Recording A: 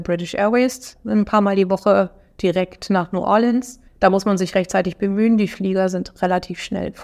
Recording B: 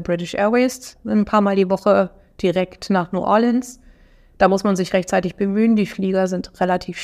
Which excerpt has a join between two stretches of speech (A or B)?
A